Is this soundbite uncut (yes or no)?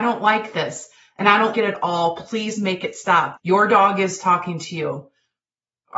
no